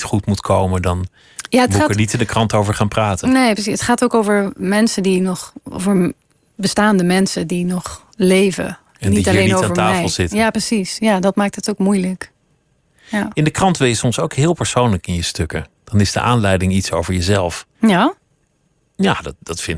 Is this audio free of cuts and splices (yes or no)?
no